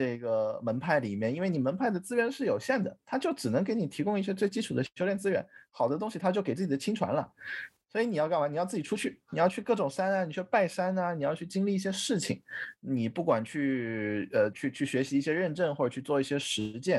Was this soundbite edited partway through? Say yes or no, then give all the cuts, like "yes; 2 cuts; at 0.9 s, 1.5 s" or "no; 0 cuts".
yes; 2 cuts; at 12.8 s, 14.5 s